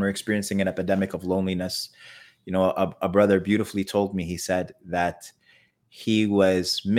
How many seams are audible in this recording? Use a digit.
0